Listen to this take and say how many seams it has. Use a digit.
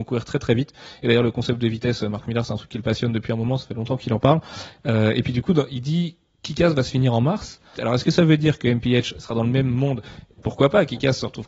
2